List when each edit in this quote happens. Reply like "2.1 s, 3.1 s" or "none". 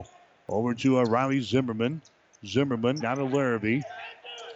3.0 s